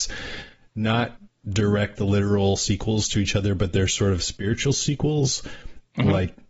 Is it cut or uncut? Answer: uncut